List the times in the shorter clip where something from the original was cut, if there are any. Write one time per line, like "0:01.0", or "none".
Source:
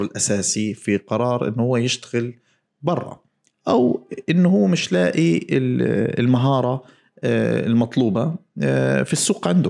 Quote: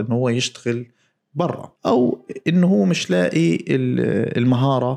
0:01.8